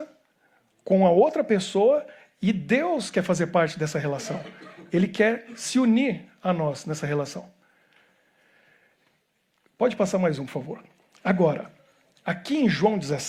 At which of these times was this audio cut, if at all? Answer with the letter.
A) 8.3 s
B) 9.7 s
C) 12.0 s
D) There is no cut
D